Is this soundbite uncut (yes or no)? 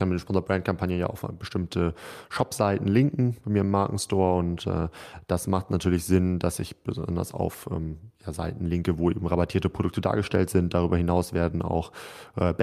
yes